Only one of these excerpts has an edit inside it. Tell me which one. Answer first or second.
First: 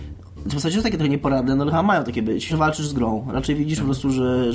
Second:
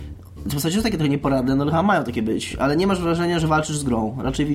first